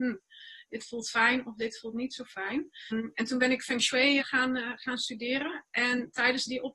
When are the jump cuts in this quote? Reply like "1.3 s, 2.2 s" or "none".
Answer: 2.9 s, 4.2 s

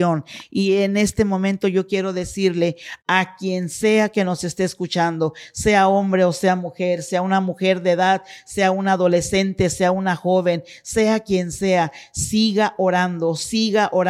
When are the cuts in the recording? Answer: none

